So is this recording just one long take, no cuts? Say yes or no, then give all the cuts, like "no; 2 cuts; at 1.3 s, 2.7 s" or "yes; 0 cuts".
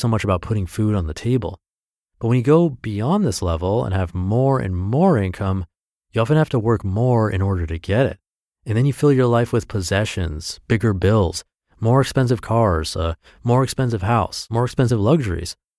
yes; 0 cuts